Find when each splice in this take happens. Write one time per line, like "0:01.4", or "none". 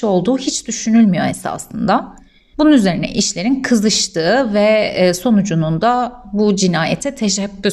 0:02.5